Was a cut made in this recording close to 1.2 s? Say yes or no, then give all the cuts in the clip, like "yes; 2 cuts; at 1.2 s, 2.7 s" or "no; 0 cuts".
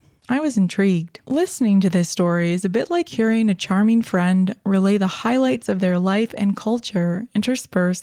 yes; 1 cut; at 1.2 s